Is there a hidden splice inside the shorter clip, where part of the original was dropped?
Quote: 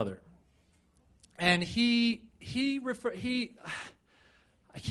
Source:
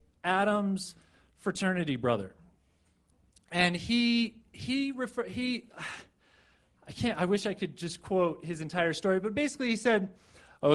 no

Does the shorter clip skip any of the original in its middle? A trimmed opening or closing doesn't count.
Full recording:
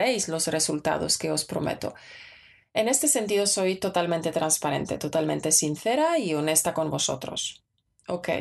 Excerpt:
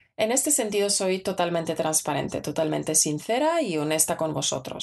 no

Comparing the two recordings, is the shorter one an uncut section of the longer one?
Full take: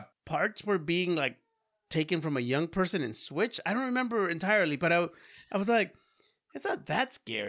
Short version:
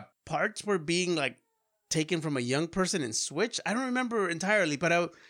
yes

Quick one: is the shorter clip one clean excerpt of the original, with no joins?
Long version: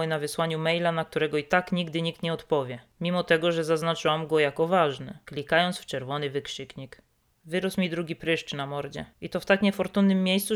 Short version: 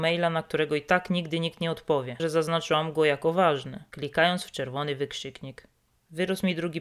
no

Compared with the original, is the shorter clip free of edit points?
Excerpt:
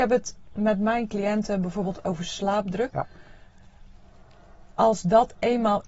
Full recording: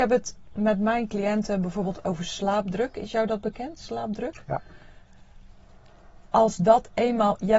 no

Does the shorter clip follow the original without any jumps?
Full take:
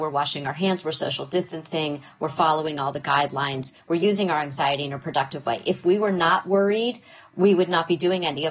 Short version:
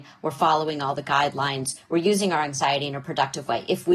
yes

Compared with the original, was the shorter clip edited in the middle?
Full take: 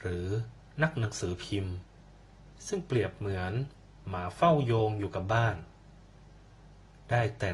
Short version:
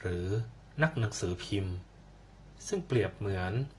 no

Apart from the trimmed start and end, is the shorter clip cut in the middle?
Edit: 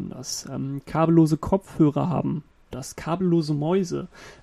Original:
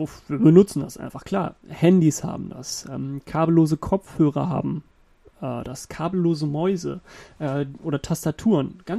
yes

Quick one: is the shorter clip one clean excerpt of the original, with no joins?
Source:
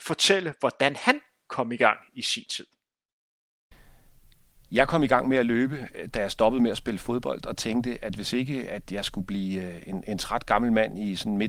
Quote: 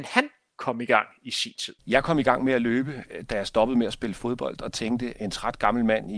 no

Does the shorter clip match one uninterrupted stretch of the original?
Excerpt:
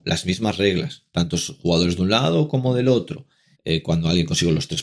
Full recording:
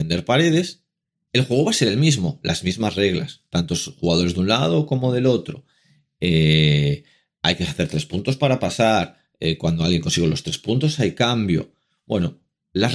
no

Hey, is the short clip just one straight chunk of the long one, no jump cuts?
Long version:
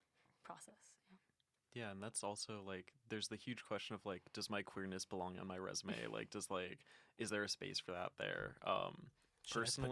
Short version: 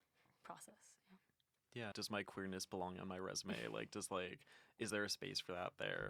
no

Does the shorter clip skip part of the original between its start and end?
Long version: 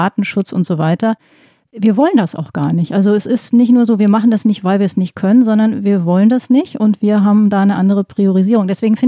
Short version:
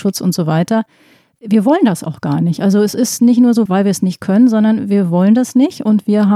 yes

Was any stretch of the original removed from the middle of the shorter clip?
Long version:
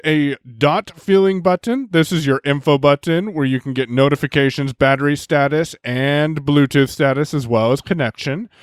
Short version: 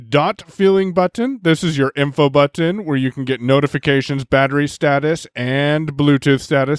no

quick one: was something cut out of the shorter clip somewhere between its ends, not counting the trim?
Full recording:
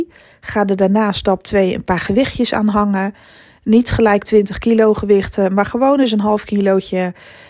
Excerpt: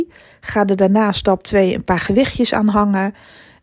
no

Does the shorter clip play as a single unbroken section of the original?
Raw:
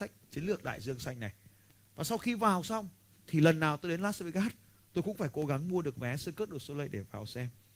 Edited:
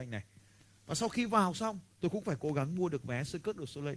no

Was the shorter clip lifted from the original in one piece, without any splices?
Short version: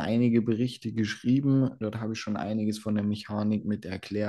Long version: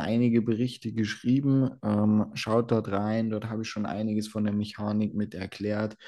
no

